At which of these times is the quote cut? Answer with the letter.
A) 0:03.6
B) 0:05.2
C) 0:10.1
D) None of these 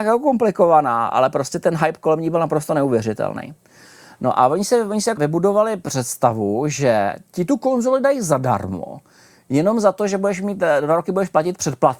B